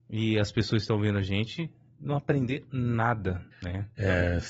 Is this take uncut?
no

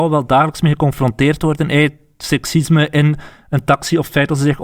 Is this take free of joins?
yes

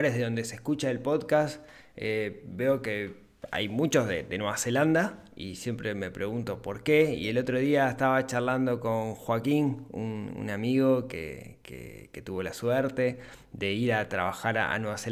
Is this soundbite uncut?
yes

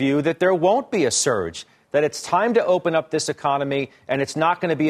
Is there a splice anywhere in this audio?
no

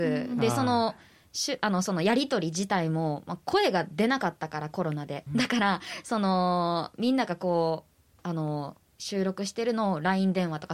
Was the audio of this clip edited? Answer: yes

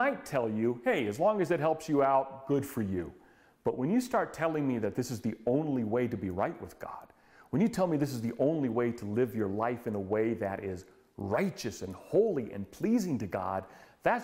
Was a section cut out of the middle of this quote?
no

